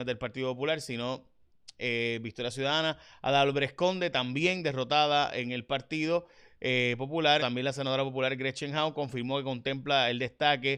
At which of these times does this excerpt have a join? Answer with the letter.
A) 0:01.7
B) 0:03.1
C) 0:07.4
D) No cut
C